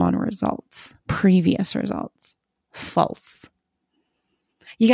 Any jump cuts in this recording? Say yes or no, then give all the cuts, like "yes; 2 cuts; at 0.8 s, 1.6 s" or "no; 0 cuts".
yes; 1 cut; at 2.6 s